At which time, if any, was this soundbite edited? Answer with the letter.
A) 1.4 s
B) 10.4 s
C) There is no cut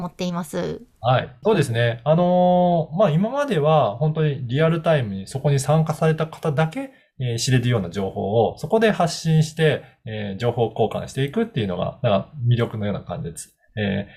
A